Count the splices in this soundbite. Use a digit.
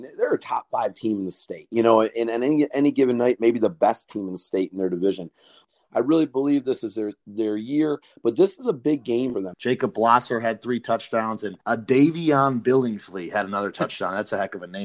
2